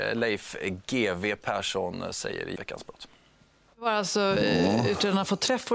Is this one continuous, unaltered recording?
no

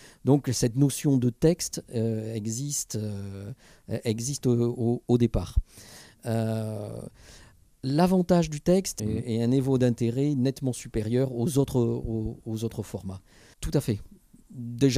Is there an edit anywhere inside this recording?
yes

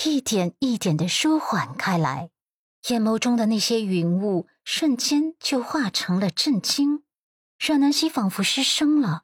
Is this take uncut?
no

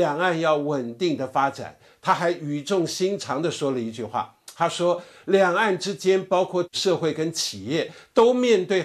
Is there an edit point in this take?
no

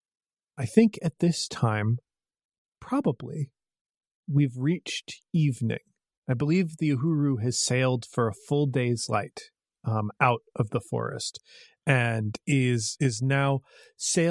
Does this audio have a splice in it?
no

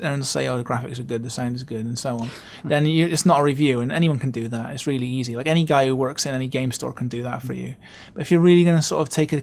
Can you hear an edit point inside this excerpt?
no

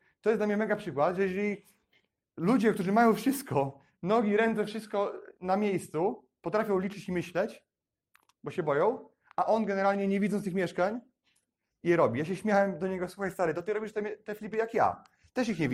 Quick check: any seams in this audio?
yes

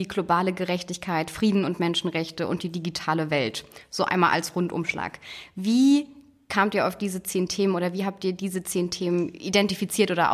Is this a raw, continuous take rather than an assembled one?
yes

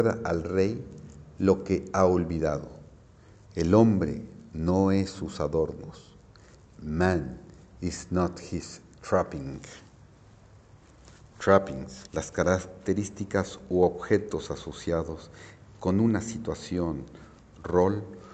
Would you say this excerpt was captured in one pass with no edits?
no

